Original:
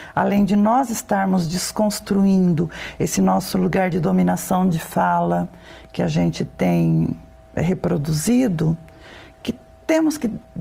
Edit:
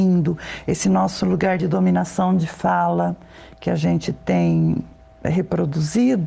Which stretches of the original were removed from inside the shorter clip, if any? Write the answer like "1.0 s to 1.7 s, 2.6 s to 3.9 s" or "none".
none